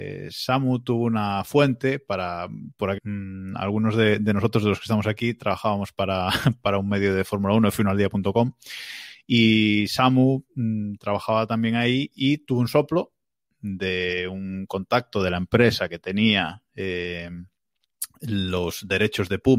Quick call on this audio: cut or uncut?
cut